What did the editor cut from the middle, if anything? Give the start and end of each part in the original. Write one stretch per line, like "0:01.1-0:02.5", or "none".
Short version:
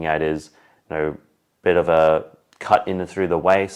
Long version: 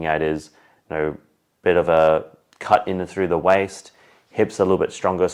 none